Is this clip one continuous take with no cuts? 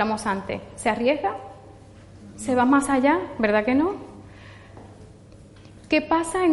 yes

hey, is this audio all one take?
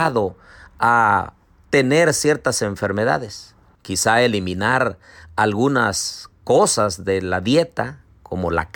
no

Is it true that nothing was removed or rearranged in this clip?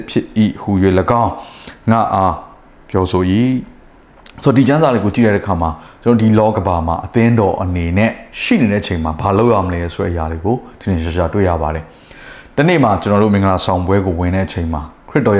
no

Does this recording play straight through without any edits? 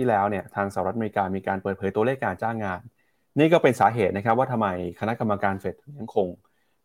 yes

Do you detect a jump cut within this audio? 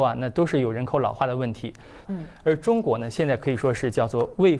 yes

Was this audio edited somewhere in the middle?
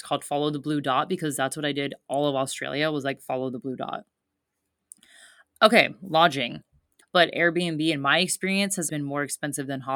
yes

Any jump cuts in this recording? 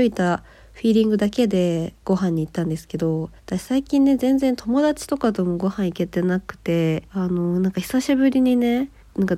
yes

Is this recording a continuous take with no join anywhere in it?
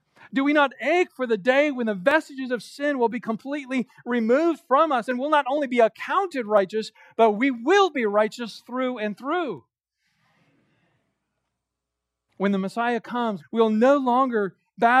no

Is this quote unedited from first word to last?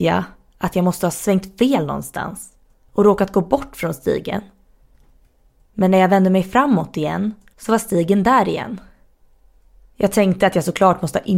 no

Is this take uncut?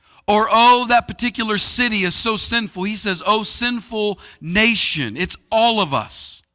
yes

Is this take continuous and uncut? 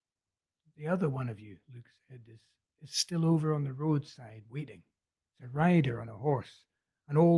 no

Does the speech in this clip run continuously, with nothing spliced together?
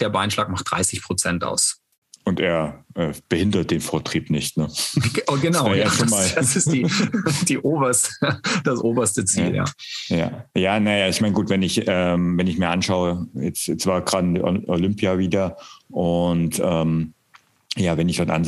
yes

